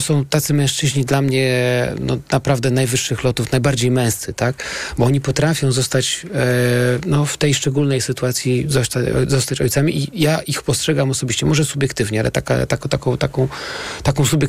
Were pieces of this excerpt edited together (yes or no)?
no